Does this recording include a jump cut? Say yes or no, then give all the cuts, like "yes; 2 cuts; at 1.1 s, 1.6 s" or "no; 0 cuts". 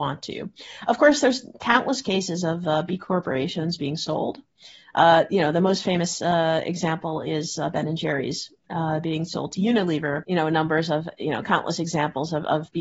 yes; 1 cut; at 10.2 s